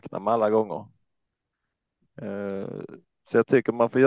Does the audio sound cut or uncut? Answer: uncut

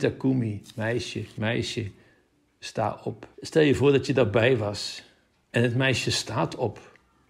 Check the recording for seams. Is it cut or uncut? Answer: cut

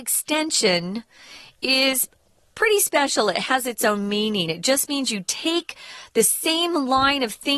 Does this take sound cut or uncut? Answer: uncut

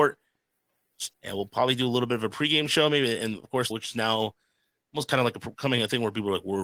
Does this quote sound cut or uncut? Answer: cut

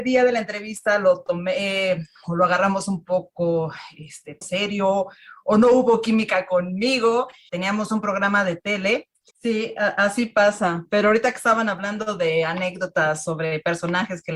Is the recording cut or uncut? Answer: cut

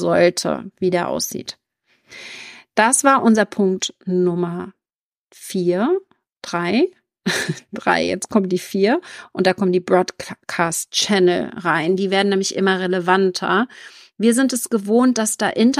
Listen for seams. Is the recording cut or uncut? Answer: uncut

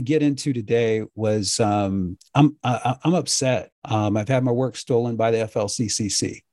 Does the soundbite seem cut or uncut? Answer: cut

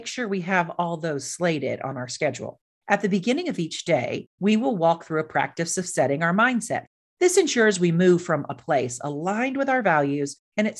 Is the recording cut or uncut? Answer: uncut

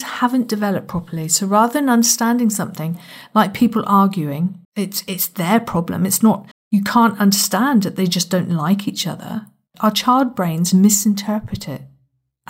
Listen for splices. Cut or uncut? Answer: cut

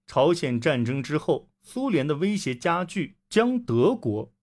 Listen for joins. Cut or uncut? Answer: cut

